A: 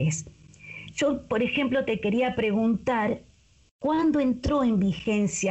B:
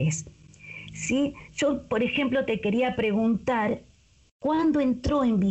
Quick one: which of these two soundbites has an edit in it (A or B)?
A